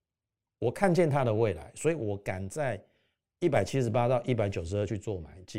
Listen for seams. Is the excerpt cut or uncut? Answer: uncut